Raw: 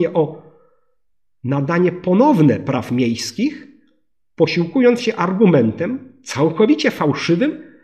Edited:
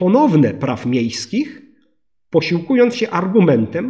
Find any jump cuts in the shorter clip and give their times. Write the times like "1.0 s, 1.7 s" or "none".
none